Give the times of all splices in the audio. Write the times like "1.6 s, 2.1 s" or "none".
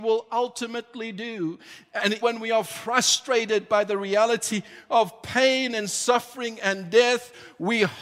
2.2 s